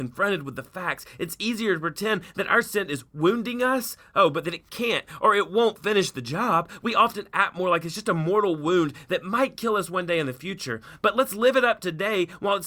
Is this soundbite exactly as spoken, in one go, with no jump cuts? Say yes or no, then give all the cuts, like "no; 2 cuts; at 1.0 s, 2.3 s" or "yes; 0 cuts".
yes; 0 cuts